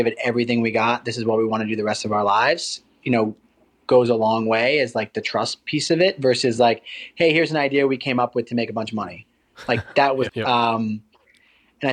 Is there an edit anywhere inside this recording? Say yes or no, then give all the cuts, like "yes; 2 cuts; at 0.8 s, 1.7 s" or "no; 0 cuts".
yes; 1 cut; at 10.3 s